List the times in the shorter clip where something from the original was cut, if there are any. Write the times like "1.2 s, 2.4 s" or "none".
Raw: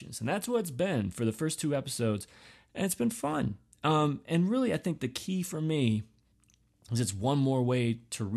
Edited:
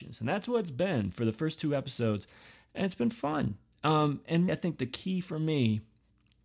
4.5 s